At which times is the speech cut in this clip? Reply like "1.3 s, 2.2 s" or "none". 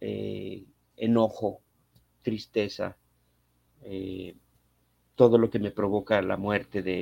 none